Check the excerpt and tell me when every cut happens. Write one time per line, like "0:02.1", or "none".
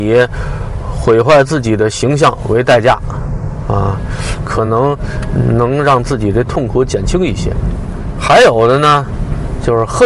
none